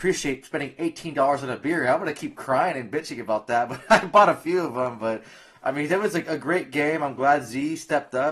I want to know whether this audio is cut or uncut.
uncut